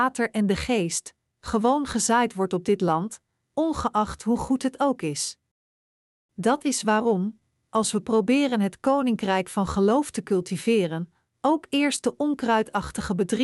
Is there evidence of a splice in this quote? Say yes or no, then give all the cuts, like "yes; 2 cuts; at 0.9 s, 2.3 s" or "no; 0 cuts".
yes; 1 cut; at 3.5 s